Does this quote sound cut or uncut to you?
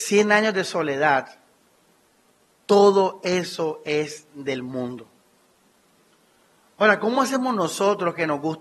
uncut